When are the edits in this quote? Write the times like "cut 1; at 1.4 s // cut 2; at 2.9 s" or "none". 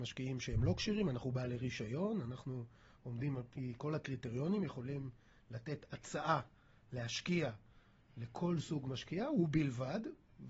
none